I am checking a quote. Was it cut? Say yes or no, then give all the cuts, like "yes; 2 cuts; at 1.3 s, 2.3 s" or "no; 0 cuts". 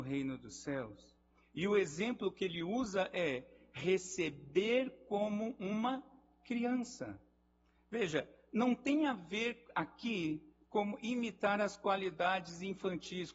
no; 0 cuts